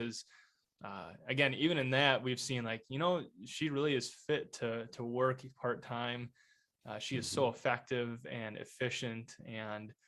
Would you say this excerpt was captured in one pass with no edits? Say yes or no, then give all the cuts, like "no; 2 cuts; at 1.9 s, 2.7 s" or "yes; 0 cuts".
yes; 0 cuts